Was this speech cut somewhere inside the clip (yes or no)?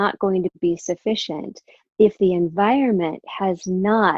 no